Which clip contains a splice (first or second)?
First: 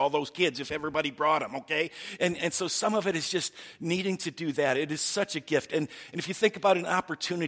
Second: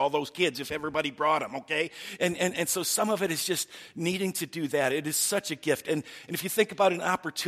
first